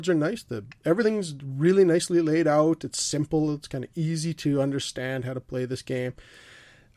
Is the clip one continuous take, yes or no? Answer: yes